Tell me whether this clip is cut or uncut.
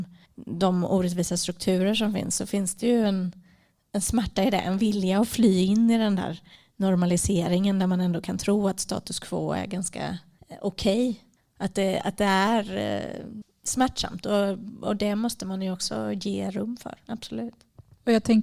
uncut